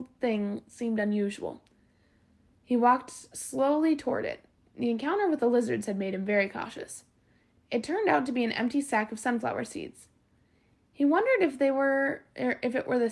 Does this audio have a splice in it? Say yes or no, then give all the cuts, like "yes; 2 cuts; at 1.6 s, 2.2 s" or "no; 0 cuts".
no; 0 cuts